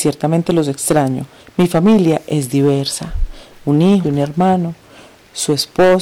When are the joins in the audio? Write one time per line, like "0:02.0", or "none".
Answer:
0:01.4
0:04.0